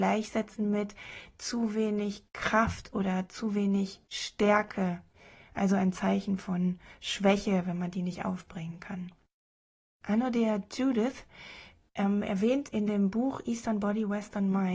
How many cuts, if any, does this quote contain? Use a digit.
0